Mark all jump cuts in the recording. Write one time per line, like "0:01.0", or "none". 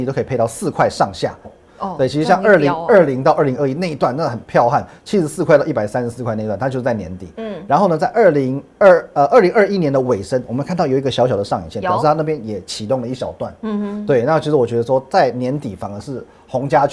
0:01.4

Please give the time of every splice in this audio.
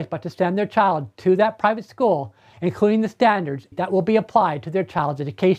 0:02.5
0:03.7

